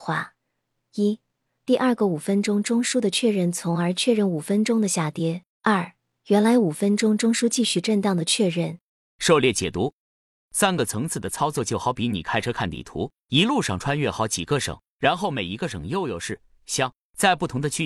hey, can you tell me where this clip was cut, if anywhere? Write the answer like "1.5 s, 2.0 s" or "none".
13.2 s, 16.6 s

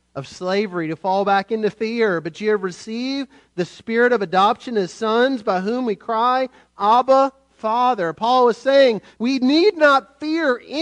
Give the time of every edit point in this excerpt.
9.1 s

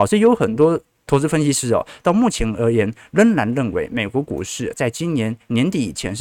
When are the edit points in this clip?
none

